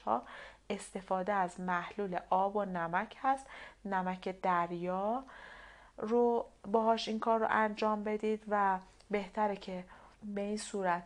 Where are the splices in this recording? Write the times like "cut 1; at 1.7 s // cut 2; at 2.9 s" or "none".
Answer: cut 1; at 10.1 s